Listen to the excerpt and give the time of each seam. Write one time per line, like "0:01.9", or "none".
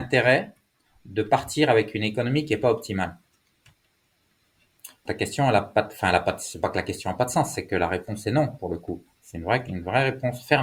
0:05.1